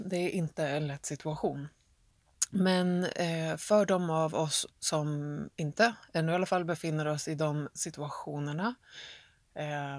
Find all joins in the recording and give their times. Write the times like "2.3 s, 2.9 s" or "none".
4.7 s